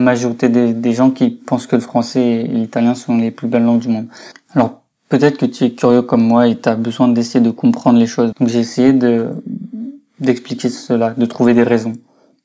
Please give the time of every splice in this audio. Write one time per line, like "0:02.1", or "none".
0:04.3
0:08.3